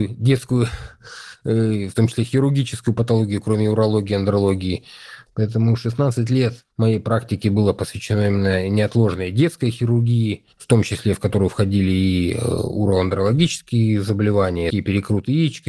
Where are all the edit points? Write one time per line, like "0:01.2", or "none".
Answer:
0:05.3
0:10.5
0:14.7

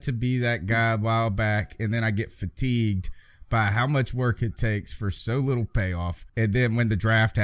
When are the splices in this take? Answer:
0:06.3

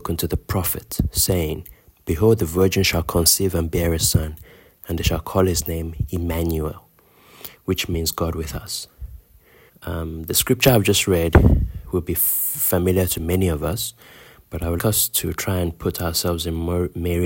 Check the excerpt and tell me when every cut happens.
0:09.7
0:14.8

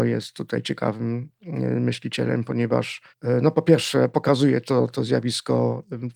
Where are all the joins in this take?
0:03.1

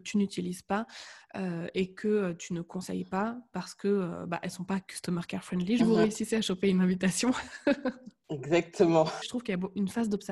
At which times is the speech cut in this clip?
0:05.8
0:09.2

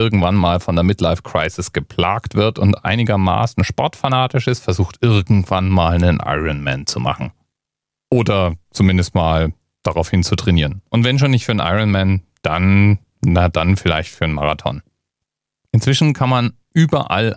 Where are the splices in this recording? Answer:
none

